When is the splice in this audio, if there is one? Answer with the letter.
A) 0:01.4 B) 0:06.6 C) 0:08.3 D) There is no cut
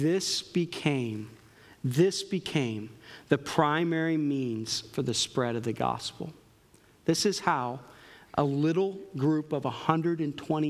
D